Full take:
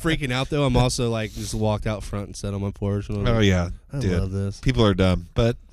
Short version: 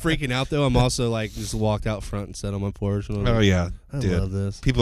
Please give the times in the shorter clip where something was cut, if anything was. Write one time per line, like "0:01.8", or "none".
none